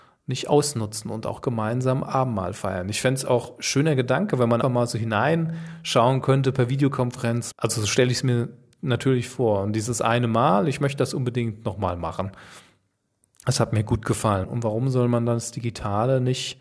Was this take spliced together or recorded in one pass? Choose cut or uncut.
cut